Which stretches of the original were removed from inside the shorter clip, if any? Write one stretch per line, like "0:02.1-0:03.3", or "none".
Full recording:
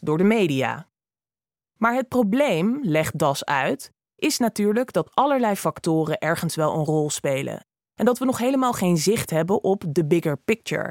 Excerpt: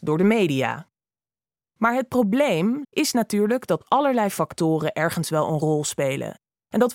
0:02.8-0:04.1